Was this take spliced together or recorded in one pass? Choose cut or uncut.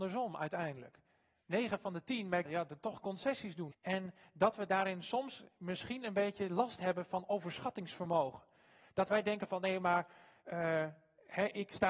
cut